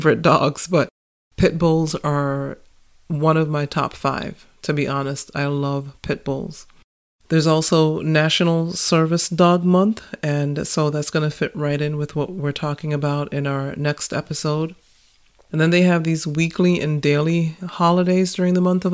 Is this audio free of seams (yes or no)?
yes